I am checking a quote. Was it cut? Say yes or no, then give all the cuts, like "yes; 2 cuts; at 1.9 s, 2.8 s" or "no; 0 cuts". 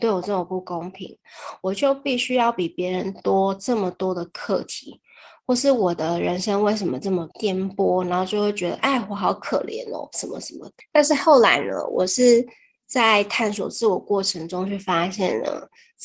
yes; 1 cut; at 7.3 s